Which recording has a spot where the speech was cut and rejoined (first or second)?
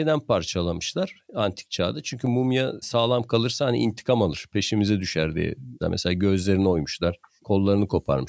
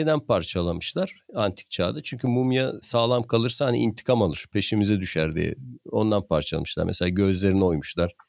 first